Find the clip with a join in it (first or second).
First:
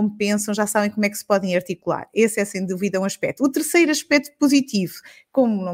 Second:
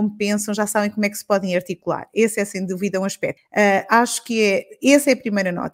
second